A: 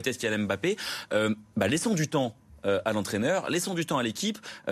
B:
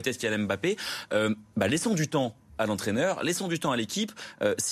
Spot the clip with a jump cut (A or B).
B